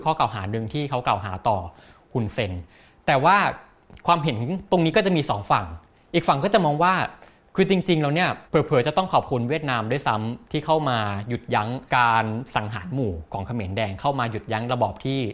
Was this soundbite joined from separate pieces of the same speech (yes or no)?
yes